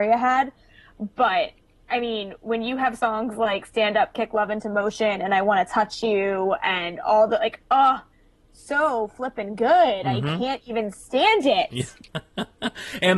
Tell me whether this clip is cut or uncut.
uncut